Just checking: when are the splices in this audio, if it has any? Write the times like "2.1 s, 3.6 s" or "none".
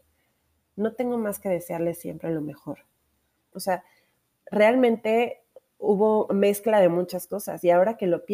3.5 s